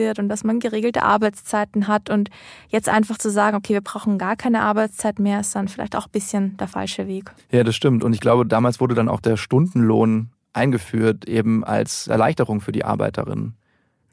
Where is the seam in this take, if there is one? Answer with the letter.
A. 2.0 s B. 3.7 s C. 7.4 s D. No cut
D